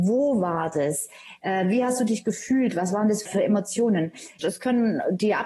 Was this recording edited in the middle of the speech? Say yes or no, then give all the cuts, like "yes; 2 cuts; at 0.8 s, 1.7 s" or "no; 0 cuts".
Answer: yes; 2 cuts; at 3.3 s, 4.4 s